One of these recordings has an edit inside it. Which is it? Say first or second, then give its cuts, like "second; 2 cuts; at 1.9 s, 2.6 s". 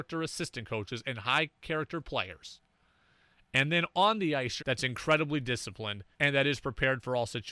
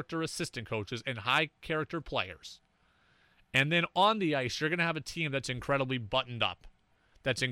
first; 2 cuts; at 4.6 s, 6.1 s